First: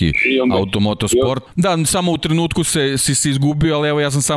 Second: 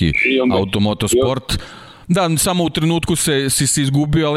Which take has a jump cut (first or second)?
first